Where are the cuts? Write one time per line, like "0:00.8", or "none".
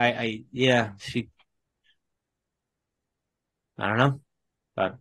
none